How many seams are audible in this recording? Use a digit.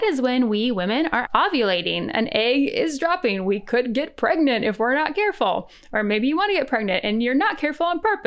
1